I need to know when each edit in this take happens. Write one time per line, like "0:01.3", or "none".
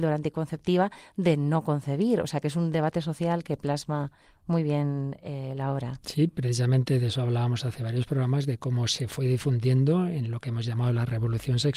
none